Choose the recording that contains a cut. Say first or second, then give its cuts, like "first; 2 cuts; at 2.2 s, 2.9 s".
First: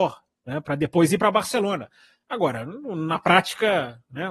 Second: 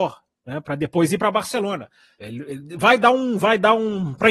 second; 1 cut; at 2.2 s